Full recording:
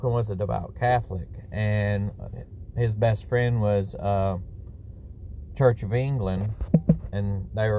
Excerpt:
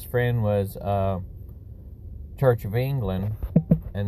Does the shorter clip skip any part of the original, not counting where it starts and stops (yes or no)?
no